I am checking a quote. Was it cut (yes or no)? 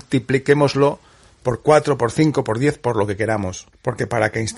no